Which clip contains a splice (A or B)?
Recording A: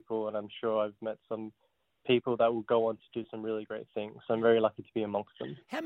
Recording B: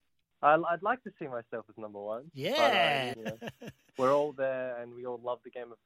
B